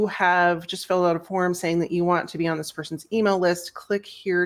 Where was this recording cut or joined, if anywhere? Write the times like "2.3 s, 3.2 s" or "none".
none

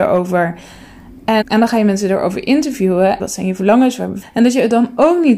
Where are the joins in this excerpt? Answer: 1.4 s, 3.2 s, 4.2 s

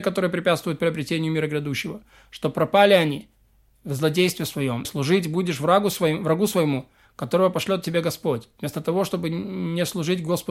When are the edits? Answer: 4.8 s

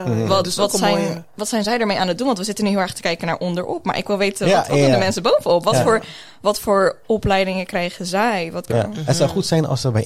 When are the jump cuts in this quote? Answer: 8.7 s

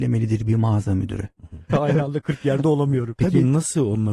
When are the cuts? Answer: 1.7 s, 3.2 s

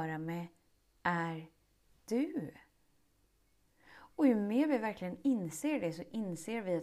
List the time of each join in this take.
none

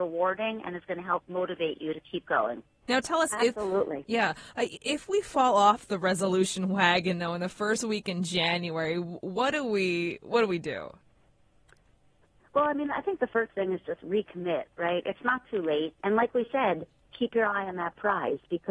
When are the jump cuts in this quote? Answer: 2.8 s, 16.0 s

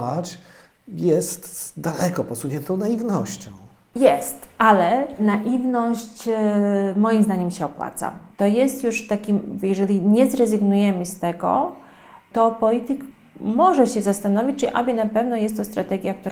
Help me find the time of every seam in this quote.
8.3 s

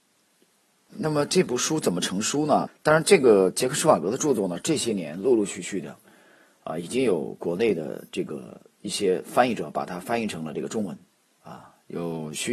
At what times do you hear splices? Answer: 0.9 s, 2.7 s

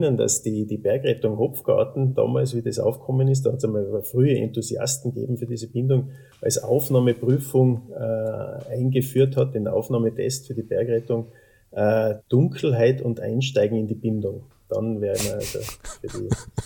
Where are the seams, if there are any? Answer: 12.2 s

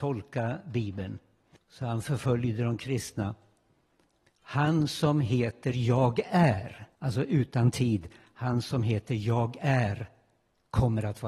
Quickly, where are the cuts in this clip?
1.6 s, 4.3 s, 7.0 s

